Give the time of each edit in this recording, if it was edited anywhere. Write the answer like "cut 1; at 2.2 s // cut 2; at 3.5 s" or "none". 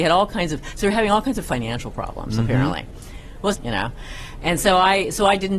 cut 1; at 3.5 s